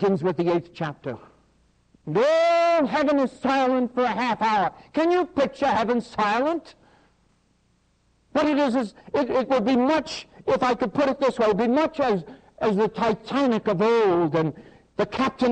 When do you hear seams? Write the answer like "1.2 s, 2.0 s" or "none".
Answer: none